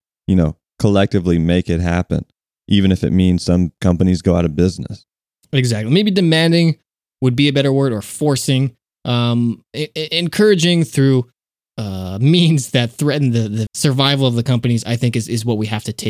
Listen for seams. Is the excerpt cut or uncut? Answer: cut